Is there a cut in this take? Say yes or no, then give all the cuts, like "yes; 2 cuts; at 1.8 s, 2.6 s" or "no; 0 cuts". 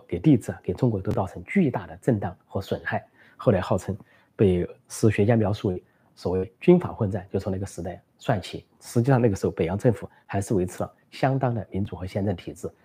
no; 0 cuts